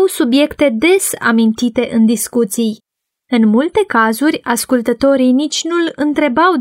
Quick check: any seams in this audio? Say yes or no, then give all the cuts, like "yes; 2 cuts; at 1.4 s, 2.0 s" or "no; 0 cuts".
no; 0 cuts